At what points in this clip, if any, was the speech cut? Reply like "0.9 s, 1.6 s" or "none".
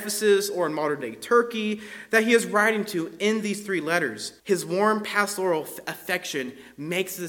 4.4 s